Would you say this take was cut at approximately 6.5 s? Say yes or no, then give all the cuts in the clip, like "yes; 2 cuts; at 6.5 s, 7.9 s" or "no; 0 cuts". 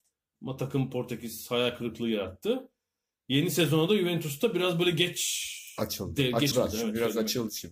yes; 1 cut; at 6.5 s